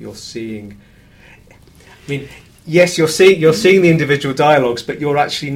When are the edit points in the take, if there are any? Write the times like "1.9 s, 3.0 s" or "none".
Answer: none